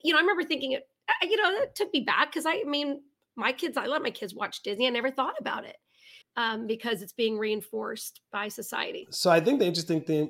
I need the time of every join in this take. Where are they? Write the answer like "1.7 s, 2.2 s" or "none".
6.2 s